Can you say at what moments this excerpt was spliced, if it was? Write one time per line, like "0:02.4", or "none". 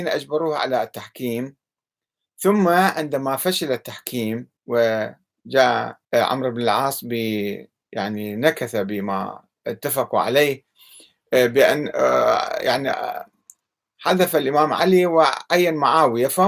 0:04.6
0:06.0